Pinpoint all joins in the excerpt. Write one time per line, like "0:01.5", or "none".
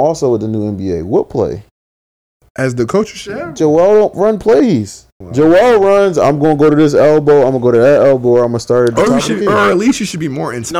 0:05.2